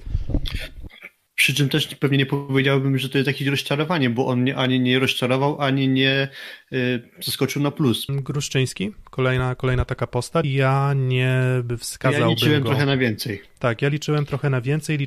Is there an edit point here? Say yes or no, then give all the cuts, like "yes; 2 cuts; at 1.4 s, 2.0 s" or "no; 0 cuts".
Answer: yes; 2 cuts; at 8.1 s, 10.4 s